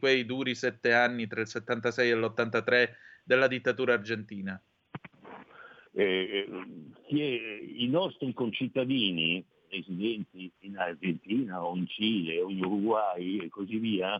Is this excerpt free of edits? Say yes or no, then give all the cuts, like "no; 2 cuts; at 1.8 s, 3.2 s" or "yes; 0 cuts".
no; 3 cuts; at 5.9 s, 9.5 s, 10.6 s